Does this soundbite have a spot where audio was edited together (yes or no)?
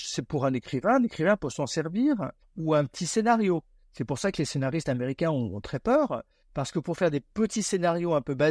yes